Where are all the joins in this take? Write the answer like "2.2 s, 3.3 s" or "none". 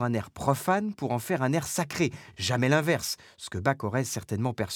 none